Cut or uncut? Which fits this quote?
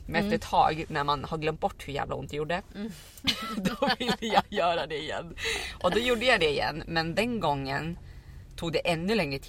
uncut